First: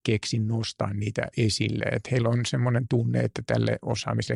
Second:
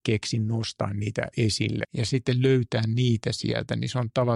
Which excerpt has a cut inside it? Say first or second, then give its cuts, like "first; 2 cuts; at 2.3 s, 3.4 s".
second; 1 cut; at 1.8 s